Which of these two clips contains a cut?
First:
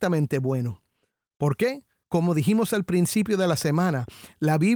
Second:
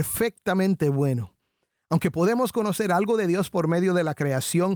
first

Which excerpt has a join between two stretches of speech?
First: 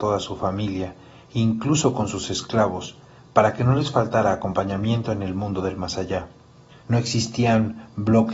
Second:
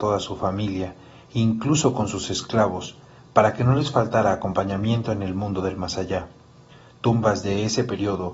first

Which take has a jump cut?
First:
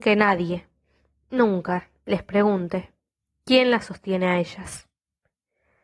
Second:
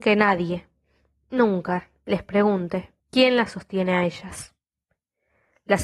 second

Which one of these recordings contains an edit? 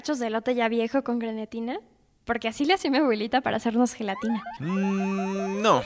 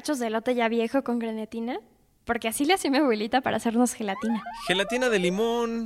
first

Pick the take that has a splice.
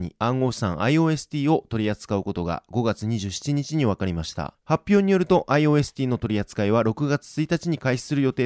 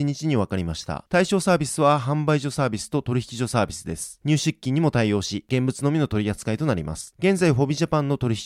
second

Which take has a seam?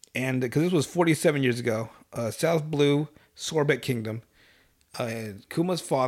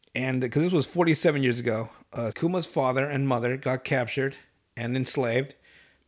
second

